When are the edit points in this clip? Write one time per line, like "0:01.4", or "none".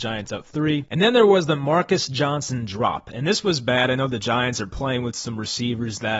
none